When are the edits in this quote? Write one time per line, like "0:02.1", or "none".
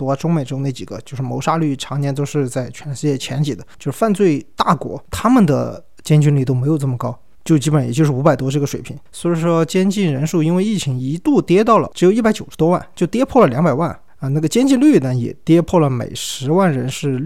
0:09.1